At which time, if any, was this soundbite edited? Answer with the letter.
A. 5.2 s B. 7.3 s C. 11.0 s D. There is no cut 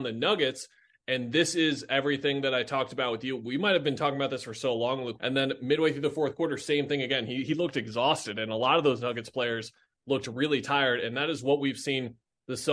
A